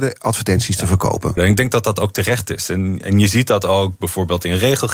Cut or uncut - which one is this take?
cut